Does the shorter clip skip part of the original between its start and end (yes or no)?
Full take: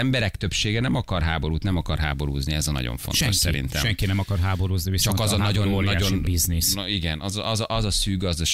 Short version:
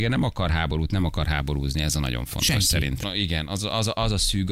yes